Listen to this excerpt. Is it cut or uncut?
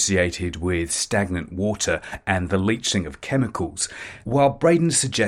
cut